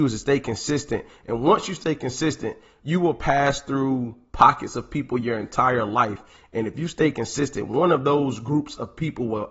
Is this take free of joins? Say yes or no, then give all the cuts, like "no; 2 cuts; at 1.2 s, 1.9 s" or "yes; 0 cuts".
yes; 0 cuts